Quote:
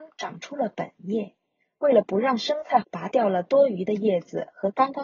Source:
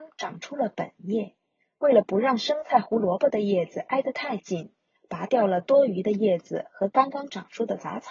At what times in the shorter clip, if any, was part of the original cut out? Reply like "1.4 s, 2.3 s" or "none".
2.8 s